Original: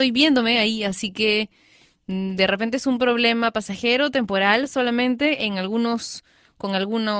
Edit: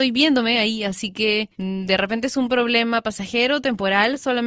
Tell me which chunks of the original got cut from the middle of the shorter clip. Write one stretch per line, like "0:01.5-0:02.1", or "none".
0:01.5-0:02.0